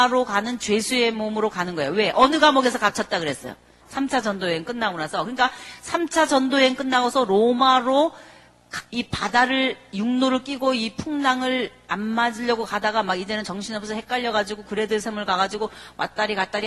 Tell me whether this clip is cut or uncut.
cut